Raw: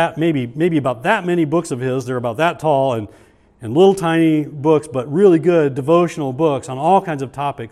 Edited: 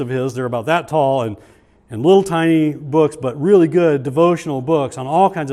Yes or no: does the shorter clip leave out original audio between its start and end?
no